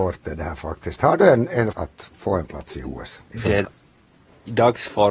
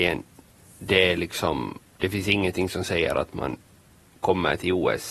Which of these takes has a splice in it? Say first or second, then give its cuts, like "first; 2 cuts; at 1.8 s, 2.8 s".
first; 2 cuts; at 1.7 s, 3.6 s